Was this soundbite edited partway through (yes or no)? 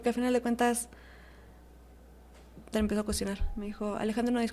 yes